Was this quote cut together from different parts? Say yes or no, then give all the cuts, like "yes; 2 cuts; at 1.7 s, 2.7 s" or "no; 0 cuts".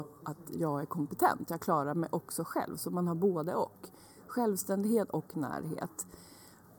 no; 0 cuts